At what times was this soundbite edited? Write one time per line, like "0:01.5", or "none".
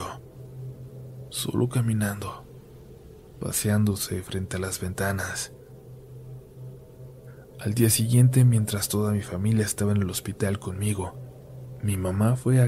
0:01.3